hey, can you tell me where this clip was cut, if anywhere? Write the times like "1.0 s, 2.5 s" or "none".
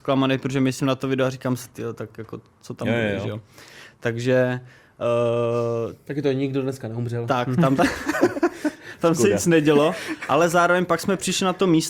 7.8 s

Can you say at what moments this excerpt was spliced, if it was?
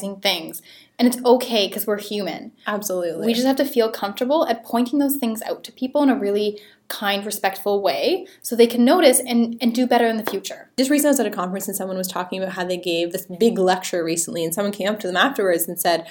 none

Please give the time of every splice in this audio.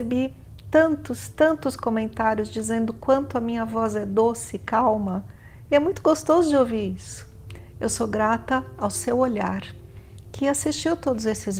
none

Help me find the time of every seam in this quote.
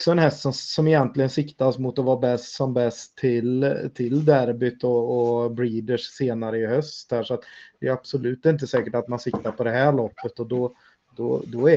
none

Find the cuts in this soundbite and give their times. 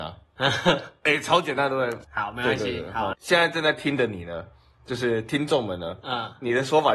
2.0 s, 3.1 s

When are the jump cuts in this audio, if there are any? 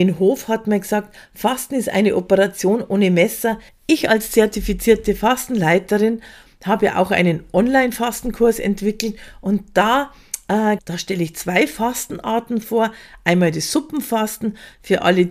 3.7 s, 10.8 s

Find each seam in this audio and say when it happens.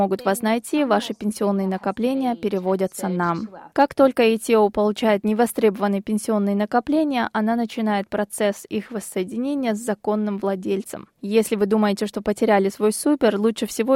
3.7 s

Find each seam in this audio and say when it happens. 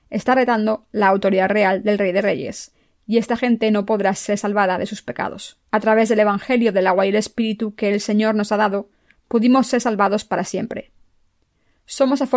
5.6 s

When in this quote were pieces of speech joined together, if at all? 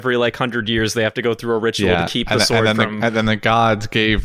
none

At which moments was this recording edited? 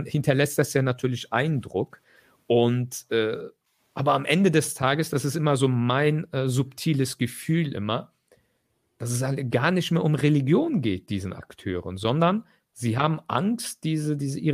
none

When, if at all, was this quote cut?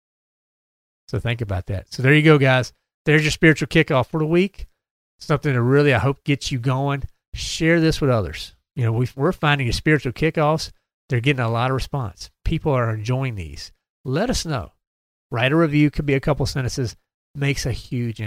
15.2 s

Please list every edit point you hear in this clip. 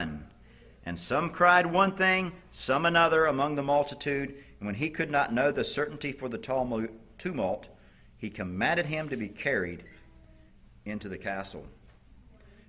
none

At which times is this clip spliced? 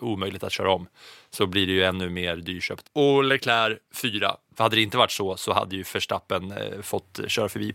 2.8 s, 4.5 s

